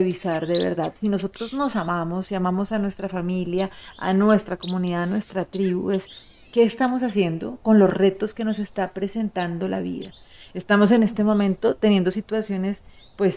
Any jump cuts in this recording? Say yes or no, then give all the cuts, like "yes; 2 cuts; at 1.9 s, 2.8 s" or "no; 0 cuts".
no; 0 cuts